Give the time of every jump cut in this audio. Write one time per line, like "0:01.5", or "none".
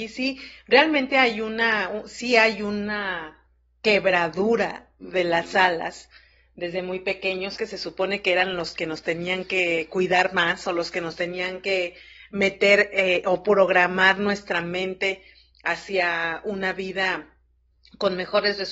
0:07.6